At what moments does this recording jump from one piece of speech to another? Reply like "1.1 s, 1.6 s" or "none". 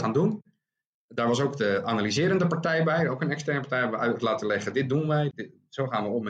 5.3 s